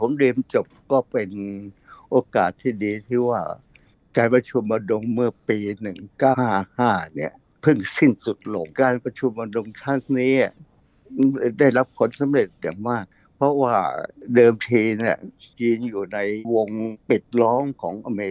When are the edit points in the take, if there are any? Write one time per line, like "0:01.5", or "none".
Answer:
0:06.3
0:08.7